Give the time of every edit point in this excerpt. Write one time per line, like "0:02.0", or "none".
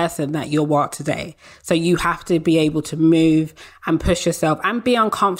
none